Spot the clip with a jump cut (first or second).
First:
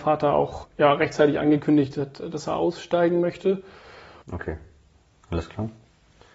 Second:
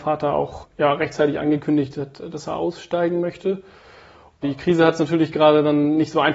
first